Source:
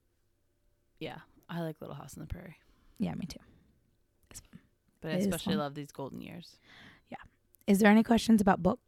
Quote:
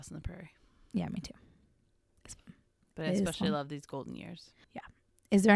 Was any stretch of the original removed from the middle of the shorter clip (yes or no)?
yes